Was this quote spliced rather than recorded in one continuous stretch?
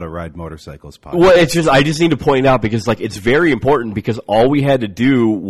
no; 0 cuts

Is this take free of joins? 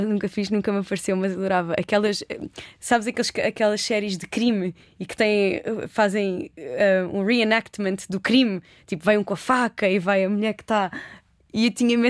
yes; 0 cuts

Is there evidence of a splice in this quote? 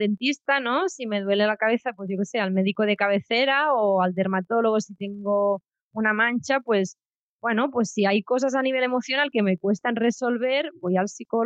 no; 0 cuts

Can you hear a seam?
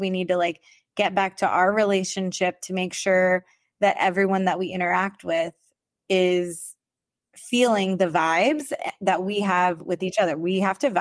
no; 0 cuts

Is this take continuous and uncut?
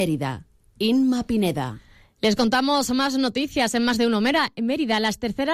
yes; 0 cuts

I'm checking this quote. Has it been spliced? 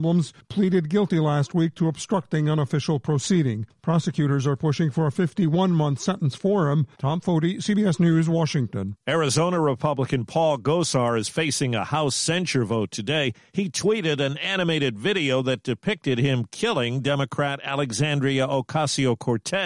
yes; 1 cut; at 6.9 s

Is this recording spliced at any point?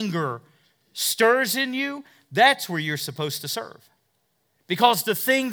yes; 1 cut; at 4.6 s

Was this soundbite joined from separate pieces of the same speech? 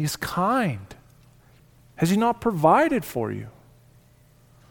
yes; 1 cut; at 1.9 s

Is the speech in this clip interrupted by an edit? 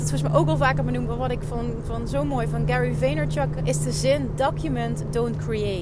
yes; 1 cut; at 3.6 s

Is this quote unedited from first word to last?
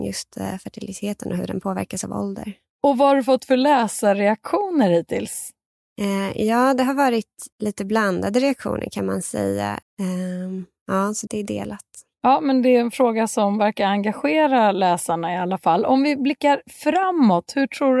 no; 3 cuts; at 7.5 s, 9.8 s, 11.3 s

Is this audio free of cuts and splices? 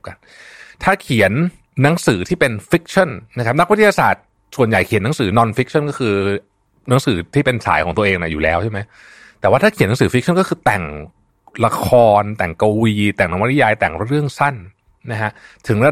yes; 0 cuts

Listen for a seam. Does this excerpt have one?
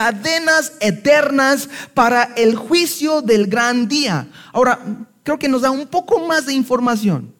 no; 0 cuts

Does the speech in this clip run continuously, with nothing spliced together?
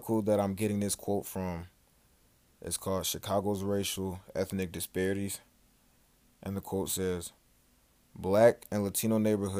yes; 0 cuts

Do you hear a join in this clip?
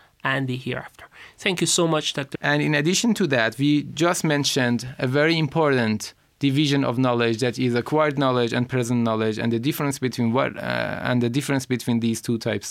yes; 1 cut; at 2.4 s

